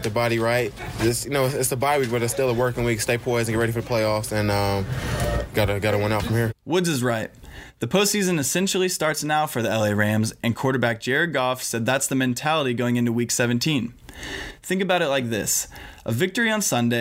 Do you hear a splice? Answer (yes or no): no